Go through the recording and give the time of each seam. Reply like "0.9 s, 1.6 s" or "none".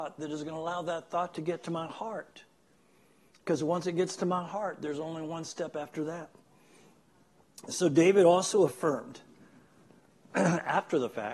none